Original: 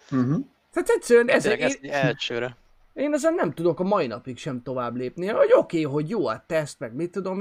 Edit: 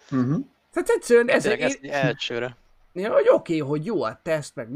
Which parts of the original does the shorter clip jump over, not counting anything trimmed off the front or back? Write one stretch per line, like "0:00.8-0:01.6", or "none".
0:03.0-0:05.2